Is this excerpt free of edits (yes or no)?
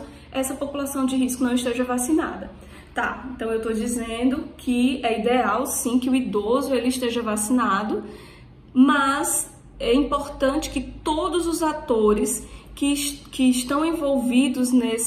yes